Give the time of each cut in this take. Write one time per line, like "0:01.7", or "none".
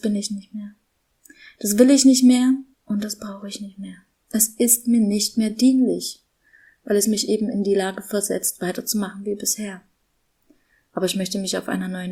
none